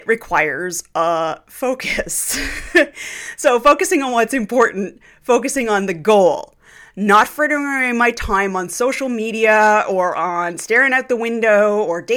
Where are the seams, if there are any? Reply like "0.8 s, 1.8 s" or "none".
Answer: none